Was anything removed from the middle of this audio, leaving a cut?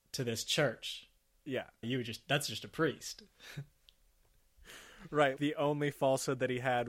yes; 2 cuts; at 1.8 s, 5.4 s

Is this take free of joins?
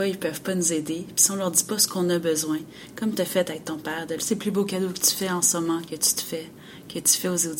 no; 2 cuts; at 4.2 s, 5.8 s

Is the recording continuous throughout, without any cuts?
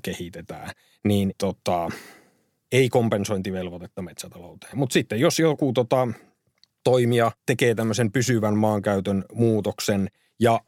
no; 2 cuts; at 4.7 s, 7.4 s

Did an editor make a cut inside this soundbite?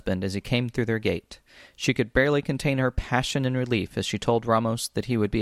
no; 0 cuts

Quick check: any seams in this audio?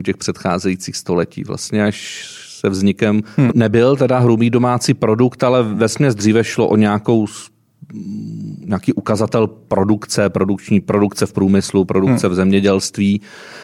yes; 1 cut; at 3.5 s

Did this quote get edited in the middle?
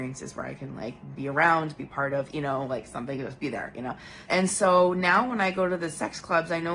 yes; 2 cuts; at 2.3 s, 4.3 s

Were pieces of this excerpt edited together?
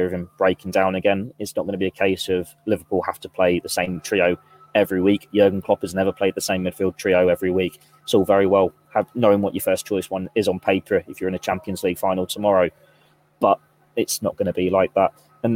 no; 0 cuts

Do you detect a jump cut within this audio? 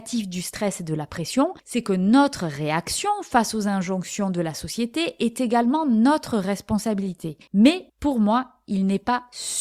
yes; 2 cuts; at 1.6 s, 7.5 s

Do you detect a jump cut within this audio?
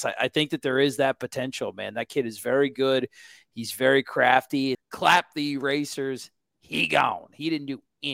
yes; 1 cut; at 4.7 s

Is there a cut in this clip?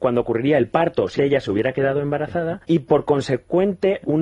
yes; 2 cuts; at 1.2 s, 2.6 s

